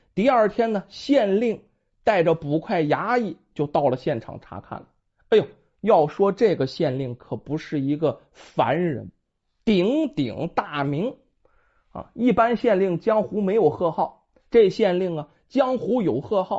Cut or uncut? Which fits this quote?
uncut